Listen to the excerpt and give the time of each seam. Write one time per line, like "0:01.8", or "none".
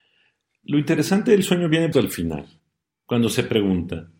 0:01.9